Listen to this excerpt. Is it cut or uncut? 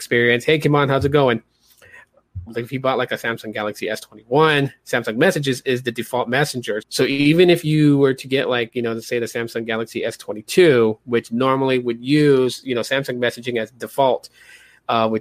cut